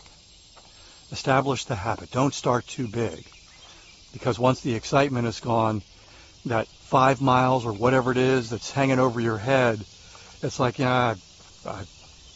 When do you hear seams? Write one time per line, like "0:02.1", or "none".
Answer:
none